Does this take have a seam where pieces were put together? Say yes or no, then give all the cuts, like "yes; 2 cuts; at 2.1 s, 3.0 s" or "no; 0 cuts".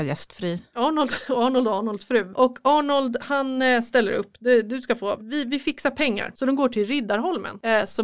yes; 1 cut; at 5.2 s